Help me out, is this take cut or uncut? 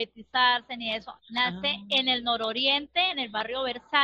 cut